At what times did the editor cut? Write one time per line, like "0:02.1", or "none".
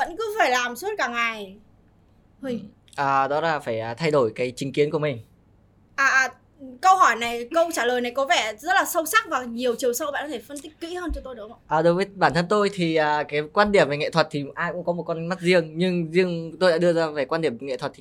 none